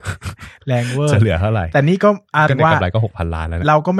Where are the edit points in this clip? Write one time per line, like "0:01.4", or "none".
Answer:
0:02.5